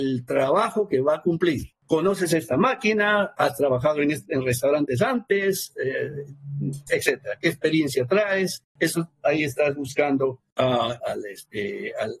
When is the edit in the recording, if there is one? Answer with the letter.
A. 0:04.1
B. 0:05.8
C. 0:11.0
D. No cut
C